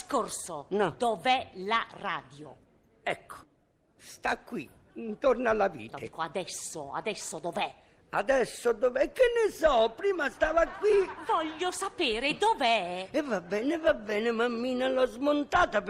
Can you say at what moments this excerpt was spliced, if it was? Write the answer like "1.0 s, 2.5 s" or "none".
none